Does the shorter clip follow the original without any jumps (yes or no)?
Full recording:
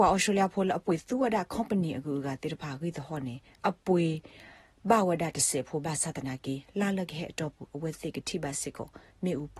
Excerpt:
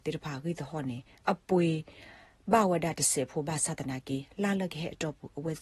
yes